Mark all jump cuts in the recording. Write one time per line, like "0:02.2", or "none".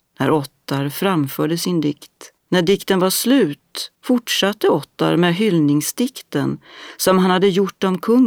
0:02.4
0:04.0